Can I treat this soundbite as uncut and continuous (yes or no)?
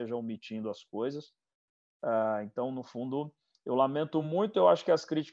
yes